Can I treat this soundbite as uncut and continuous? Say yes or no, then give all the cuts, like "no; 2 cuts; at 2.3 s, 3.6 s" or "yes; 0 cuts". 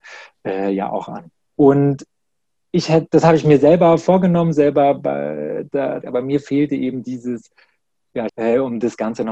no; 3 cuts; at 1.5 s, 6.0 s, 8.3 s